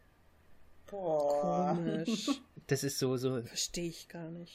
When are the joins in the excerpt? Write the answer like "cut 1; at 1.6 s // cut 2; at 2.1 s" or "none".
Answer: none

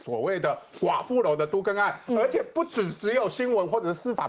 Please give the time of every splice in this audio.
none

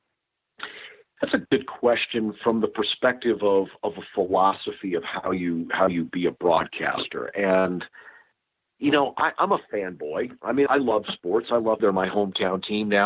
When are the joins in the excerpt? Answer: cut 1; at 10.7 s // cut 2; at 11.8 s

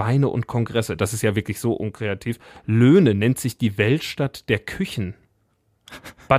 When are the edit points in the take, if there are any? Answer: none

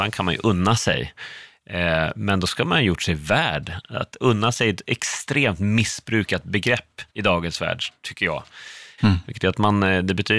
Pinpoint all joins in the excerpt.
cut 1; at 7.1 s // cut 2; at 9.0 s

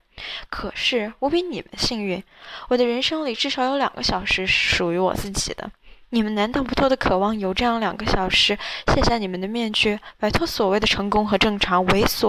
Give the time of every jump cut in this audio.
cut 1; at 6.8 s

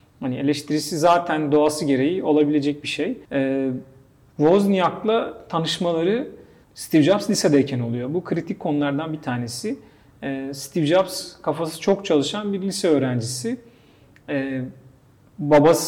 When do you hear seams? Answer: cut 1; at 3.3 s

